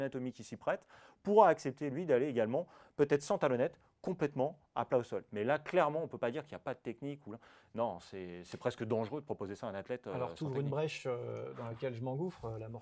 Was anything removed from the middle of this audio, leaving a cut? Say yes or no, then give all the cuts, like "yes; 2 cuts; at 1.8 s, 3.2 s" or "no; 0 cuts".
no; 0 cuts